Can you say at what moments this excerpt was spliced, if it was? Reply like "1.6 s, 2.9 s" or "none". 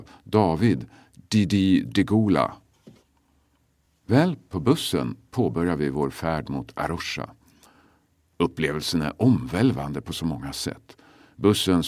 none